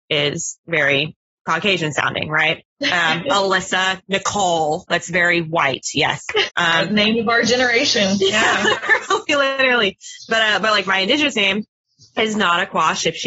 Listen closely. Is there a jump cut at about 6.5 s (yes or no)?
yes